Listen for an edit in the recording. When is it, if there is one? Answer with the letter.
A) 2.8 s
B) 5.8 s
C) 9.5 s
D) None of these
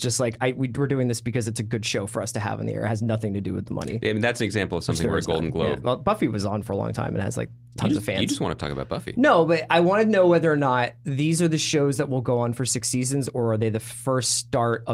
B